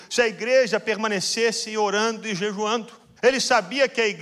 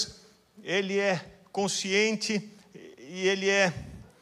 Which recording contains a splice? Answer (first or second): first